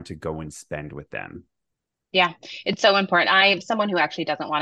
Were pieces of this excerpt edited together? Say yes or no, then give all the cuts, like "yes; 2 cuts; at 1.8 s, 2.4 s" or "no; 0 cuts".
no; 0 cuts